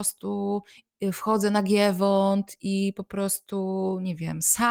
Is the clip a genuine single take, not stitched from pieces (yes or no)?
yes